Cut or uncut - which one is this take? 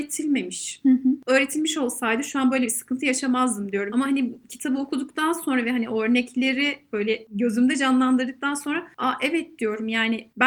cut